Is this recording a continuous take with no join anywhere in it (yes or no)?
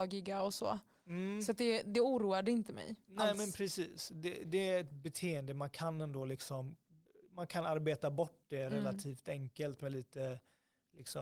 no